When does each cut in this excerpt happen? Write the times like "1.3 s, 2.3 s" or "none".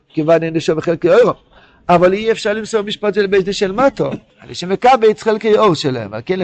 4.3 s